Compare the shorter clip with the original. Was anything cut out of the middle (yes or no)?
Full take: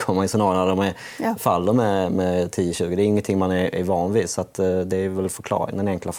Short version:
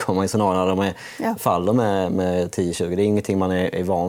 no